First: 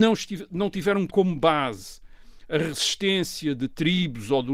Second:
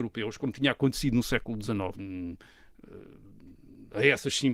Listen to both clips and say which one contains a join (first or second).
second